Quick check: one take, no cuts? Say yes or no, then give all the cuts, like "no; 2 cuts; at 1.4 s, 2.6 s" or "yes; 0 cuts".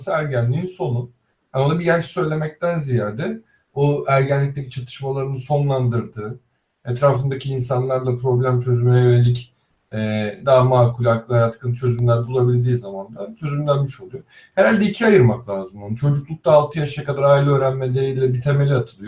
yes; 0 cuts